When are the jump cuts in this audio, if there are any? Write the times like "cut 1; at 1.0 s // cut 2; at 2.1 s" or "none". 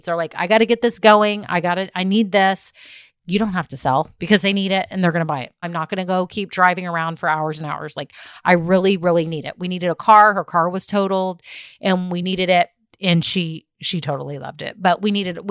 cut 1; at 5.6 s